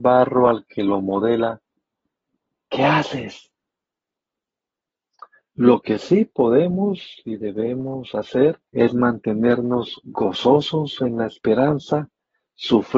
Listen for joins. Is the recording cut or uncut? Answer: cut